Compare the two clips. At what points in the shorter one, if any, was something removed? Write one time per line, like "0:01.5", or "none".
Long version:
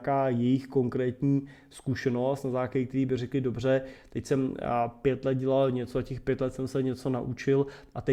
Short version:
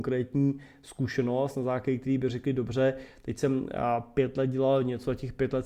none